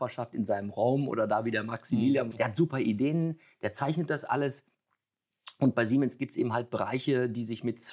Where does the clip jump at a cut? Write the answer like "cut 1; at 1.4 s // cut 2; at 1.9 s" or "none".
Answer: cut 1; at 2.3 s